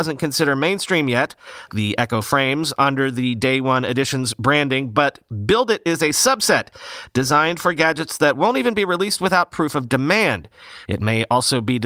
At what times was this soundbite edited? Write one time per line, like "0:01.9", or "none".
0:01.7
0:10.9